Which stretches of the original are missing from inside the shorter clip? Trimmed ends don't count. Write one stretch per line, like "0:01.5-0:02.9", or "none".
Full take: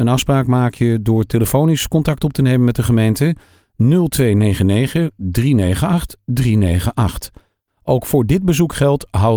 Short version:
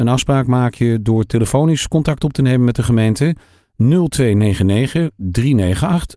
none